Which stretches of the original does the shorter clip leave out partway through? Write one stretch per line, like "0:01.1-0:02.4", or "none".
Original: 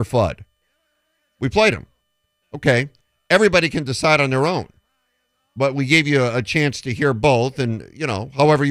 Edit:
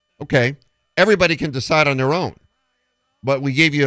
none